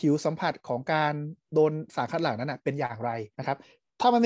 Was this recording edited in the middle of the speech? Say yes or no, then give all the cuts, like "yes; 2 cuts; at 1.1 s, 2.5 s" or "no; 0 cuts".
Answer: yes; 1 cut; at 3.3 s